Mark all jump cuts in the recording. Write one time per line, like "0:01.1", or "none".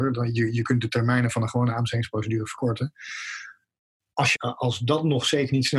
0:04.3